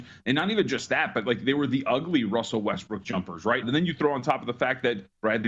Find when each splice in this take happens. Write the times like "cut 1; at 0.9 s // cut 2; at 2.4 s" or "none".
cut 1; at 3.6 s

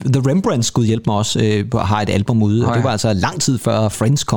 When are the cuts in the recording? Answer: none

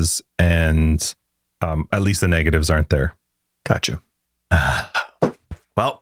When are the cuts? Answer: none

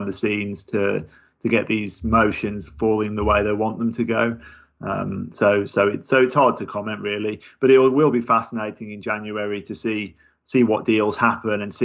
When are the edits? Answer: none

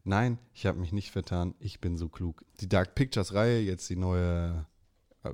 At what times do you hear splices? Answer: cut 1; at 2.5 s

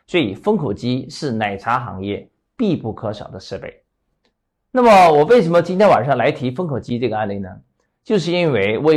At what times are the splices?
none

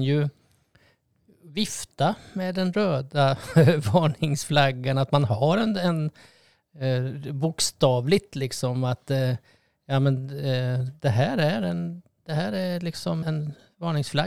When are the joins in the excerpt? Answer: cut 1; at 13.2 s

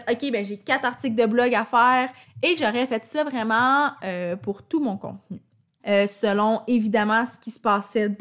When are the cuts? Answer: cut 1; at 2.2 s // cut 2; at 5.8 s

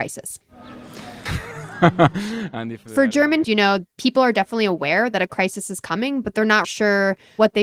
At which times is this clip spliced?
cut 1; at 1.3 s // cut 2; at 3.4 s // cut 3; at 6.6 s

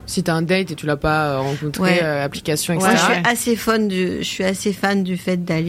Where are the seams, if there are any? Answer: none

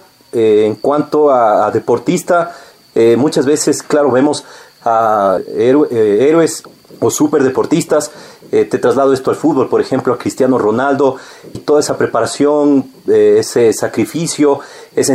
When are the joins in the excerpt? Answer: cut 1; at 11.5 s

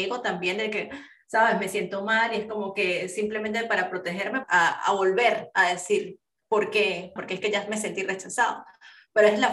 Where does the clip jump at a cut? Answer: cut 1; at 4.4 s // cut 2; at 7.2 s

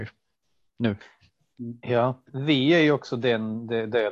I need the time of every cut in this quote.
cut 1; at 2.3 s

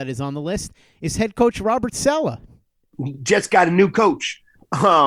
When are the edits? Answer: none

